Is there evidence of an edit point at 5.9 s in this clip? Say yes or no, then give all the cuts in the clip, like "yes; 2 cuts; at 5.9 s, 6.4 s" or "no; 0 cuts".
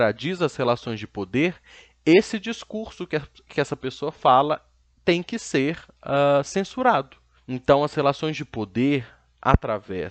no; 1 cut; at 7.4 s